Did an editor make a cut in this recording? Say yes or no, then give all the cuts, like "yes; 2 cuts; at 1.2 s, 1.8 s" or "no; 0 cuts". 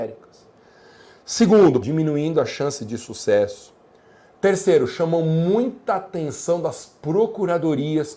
yes; 1 cut; at 1.8 s